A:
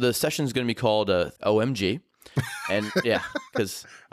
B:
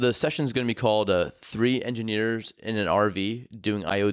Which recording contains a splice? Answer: A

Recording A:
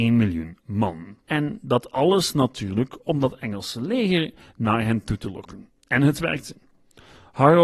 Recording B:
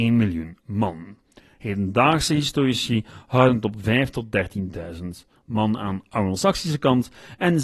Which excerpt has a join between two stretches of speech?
A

